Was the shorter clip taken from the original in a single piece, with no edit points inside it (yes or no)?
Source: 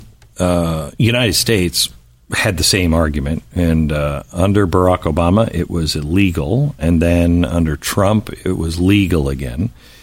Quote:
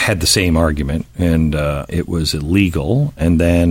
no